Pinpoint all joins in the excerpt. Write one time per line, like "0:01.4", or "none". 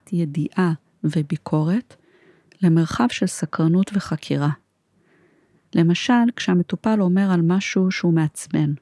none